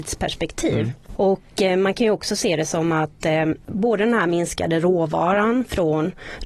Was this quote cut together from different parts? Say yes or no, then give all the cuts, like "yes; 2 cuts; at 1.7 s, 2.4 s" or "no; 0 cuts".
no; 0 cuts